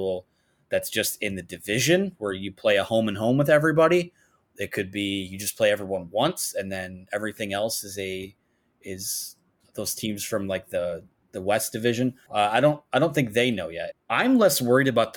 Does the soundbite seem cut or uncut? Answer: cut